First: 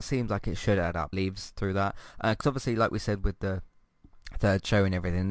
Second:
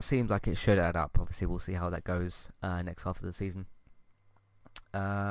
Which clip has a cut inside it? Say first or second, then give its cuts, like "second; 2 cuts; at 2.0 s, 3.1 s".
first; 1 cut; at 1.1 s